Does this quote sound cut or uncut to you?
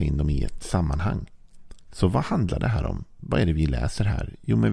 uncut